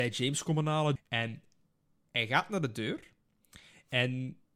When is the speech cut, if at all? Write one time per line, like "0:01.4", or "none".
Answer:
0:01.0